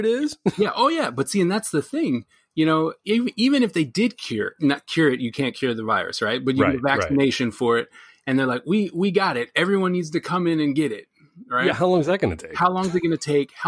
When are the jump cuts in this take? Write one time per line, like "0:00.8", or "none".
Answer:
none